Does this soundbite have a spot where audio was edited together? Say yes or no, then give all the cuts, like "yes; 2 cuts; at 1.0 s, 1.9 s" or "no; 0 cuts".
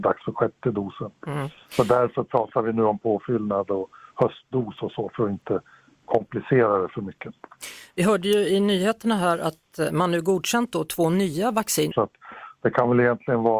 yes; 1 cut; at 11.9 s